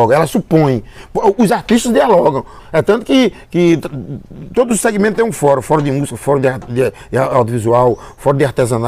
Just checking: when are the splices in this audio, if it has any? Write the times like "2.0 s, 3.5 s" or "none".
2.6 s